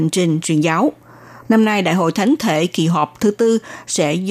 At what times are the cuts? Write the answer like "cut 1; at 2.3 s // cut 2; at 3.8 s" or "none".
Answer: cut 1; at 1.5 s